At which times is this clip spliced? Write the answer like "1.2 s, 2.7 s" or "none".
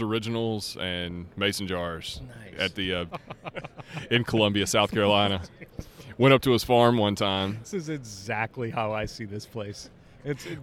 3.1 s